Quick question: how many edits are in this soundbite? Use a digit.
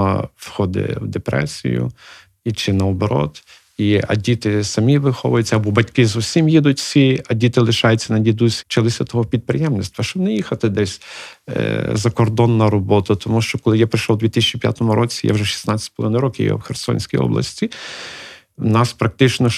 1